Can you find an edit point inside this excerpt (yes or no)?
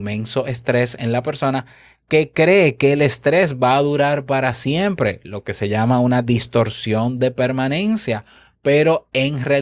no